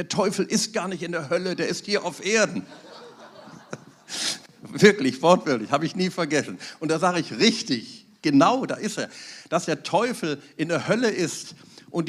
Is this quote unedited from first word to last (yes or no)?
yes